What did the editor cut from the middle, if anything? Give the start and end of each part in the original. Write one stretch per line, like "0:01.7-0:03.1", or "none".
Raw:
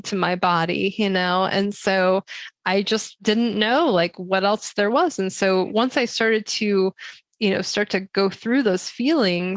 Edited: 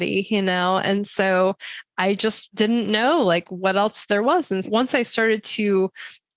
0:05.3-0:05.7